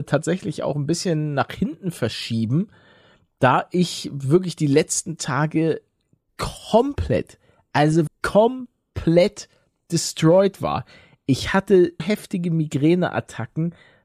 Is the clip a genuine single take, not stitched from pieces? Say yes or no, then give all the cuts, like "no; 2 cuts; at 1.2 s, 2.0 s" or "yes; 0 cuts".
no; 2 cuts; at 8.1 s, 12.0 s